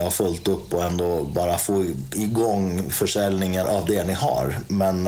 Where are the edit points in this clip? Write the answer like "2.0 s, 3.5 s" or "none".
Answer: none